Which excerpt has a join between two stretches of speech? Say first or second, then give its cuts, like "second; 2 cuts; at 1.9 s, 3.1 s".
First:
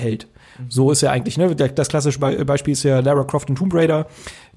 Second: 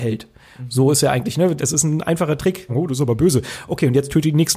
second; 2 cuts; at 1.6 s, 2.7 s